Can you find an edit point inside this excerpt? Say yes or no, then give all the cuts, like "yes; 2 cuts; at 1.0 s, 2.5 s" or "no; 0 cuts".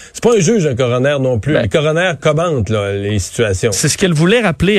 no; 0 cuts